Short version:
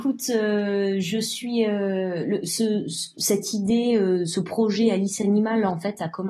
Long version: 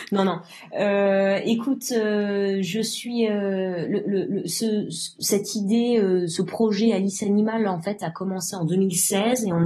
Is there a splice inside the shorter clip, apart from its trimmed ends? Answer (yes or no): yes